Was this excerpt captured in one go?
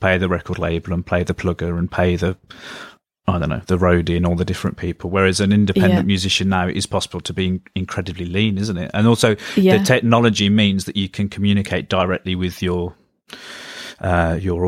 yes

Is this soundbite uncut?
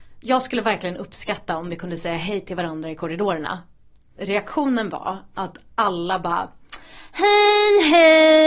yes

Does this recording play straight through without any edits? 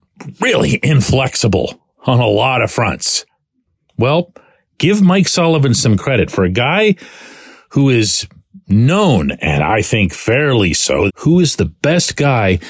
no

